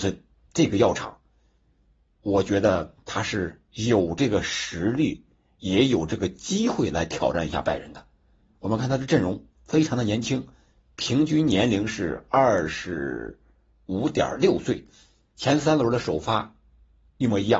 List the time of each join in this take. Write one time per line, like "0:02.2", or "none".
none